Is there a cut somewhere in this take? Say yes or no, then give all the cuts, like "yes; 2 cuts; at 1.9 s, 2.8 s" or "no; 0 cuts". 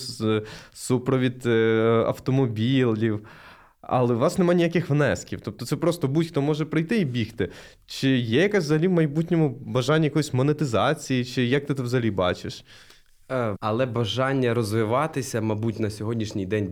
yes; 1 cut; at 13.6 s